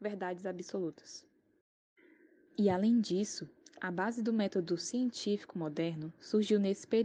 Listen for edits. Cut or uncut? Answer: uncut